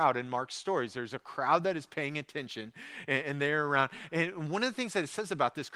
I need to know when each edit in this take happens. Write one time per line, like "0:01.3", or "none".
none